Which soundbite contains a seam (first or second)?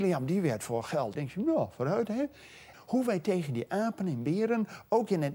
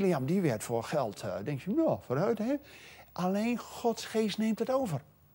first